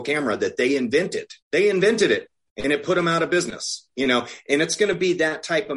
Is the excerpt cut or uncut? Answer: cut